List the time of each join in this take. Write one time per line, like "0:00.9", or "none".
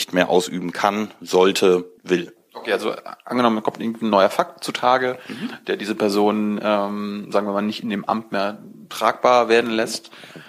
0:02.0